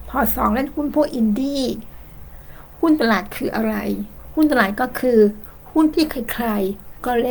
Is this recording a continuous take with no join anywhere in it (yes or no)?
yes